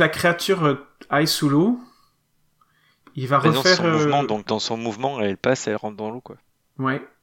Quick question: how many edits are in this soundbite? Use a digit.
1